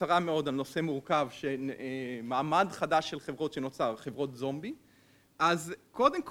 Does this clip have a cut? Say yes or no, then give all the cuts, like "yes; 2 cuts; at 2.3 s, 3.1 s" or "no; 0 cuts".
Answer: yes; 1 cut; at 5.3 s